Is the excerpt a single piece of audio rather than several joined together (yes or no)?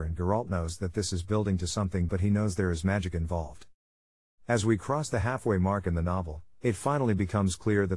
no